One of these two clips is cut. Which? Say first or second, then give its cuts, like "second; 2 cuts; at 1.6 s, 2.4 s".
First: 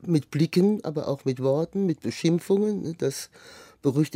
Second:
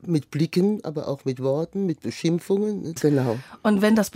second; 1 cut; at 3.0 s